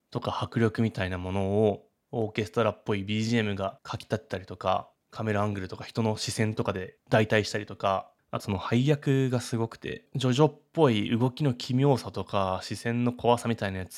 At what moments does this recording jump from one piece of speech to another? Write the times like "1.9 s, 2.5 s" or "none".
8.4 s